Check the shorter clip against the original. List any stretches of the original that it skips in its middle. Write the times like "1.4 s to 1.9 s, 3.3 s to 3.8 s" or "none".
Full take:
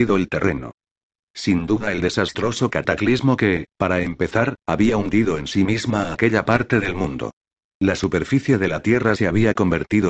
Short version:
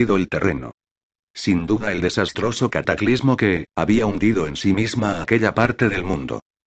3.7 s to 4.6 s